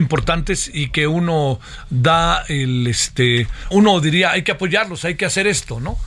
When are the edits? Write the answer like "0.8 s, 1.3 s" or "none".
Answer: 3.7 s